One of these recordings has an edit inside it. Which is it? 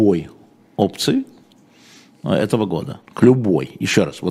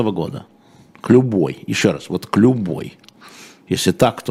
first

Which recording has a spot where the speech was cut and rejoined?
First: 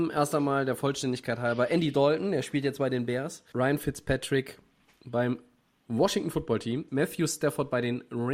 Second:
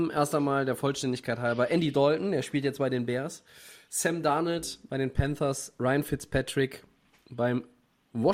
first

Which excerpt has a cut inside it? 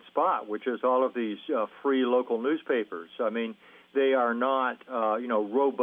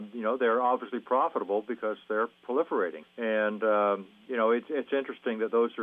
second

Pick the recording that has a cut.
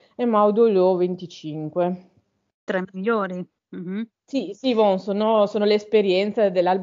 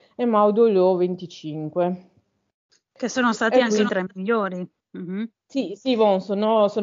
first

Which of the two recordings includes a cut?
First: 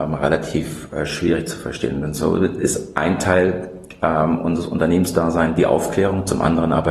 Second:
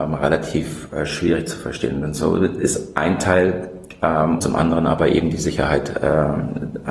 second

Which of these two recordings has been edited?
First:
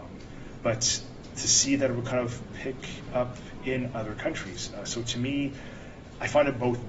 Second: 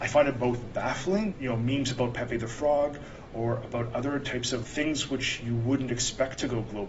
second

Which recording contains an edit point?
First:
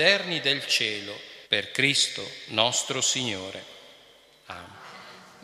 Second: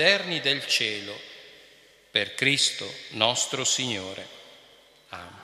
first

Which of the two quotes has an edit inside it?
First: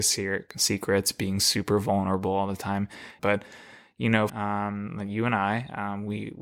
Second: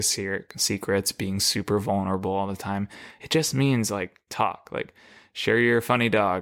first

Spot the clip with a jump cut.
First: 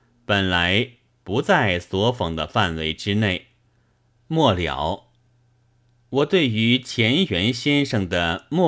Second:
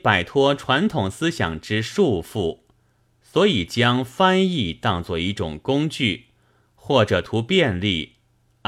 first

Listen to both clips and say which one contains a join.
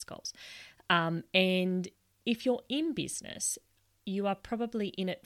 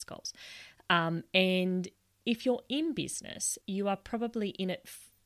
second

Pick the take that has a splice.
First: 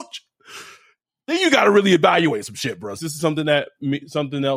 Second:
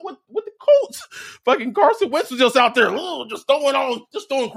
first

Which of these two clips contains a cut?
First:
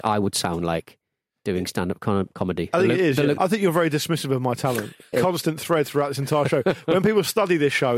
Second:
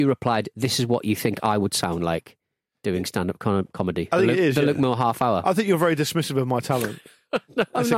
first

